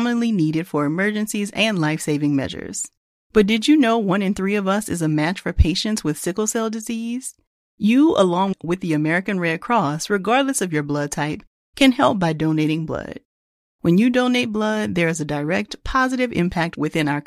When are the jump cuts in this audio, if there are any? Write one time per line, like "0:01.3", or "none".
0:13.6